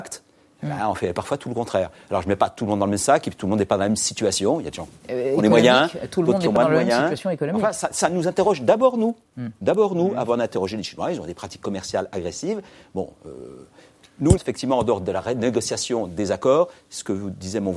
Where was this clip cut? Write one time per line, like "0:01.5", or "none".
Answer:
0:14.4